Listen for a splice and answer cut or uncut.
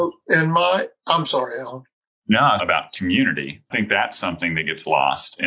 cut